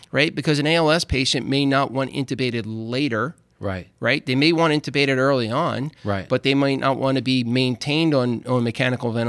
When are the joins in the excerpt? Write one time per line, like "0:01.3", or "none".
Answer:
none